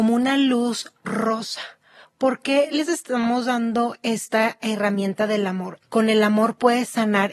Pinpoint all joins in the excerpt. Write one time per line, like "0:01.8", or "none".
0:05.8